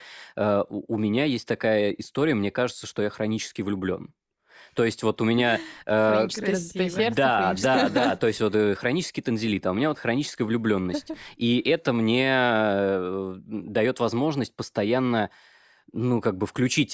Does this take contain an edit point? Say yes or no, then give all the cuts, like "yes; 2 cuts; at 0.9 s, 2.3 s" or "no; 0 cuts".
no; 0 cuts